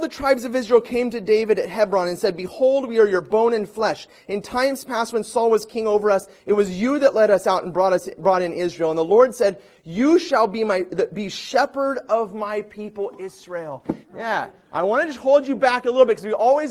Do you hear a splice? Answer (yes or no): yes